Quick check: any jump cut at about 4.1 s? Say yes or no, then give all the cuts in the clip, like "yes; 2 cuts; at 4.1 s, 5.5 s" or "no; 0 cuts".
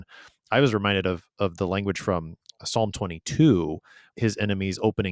yes; 1 cut; at 4.1 s